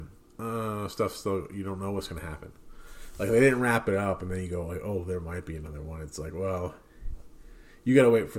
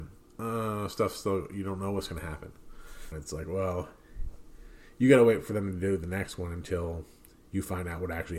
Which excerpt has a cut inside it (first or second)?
second